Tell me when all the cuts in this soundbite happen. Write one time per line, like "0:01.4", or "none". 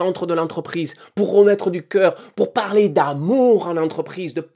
none